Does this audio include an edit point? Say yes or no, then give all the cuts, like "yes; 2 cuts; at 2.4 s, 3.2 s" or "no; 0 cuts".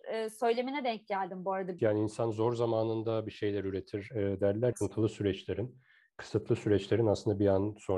yes; 2 cuts; at 1.8 s, 4.7 s